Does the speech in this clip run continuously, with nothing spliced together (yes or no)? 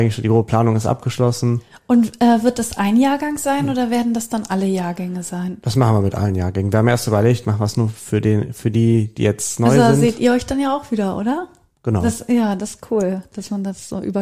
yes